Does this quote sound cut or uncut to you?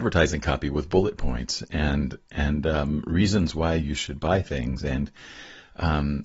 uncut